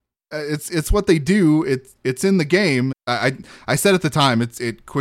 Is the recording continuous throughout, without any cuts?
no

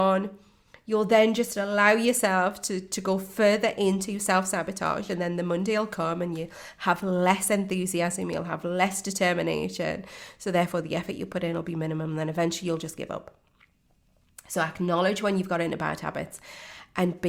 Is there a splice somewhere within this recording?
yes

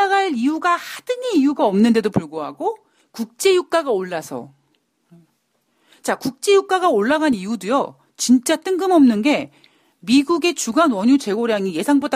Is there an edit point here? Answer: no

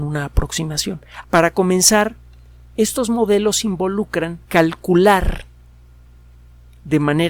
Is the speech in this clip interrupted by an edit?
yes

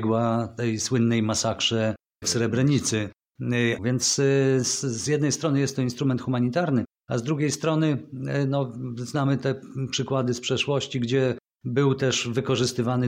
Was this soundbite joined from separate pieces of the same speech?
yes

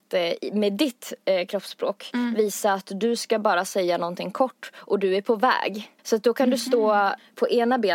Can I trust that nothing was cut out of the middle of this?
no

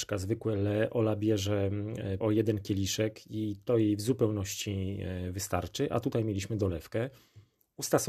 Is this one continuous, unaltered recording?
no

